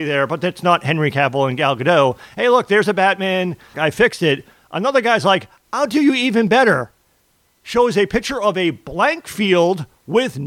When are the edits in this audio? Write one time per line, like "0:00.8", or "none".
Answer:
0:03.7